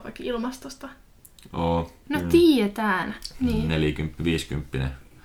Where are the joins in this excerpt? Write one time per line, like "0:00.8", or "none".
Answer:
0:02.0
0:03.3